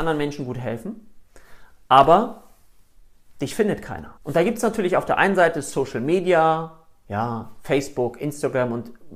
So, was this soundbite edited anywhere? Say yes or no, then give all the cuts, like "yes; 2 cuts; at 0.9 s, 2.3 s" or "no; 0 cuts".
yes; 1 cut; at 4.2 s